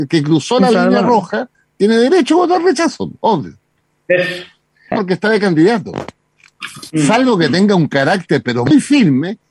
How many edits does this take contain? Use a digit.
2